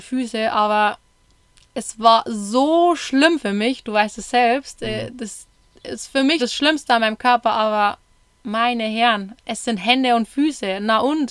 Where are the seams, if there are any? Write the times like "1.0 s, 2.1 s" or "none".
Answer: 6.4 s, 9.4 s